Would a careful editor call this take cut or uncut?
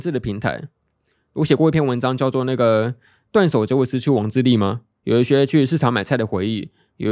cut